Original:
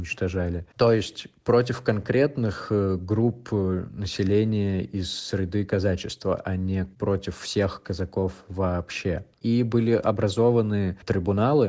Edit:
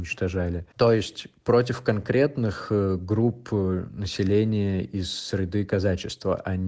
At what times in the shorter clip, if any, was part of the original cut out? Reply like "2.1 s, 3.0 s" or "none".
none